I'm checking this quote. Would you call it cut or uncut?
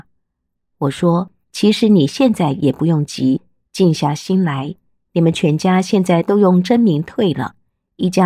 uncut